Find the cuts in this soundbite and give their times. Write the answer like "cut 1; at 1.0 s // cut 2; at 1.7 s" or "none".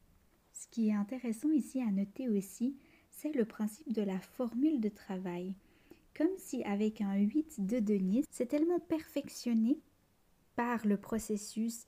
cut 1; at 8.3 s